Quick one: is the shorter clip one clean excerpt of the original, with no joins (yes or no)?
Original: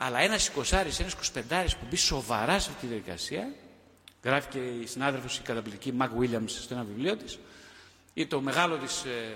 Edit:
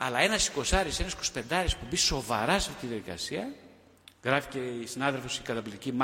yes